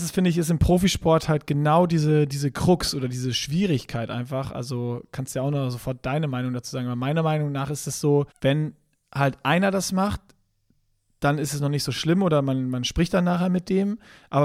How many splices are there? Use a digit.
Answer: 1